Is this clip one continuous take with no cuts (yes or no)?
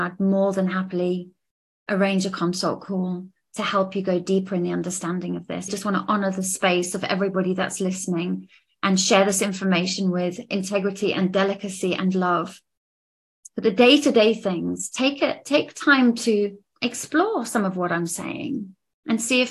no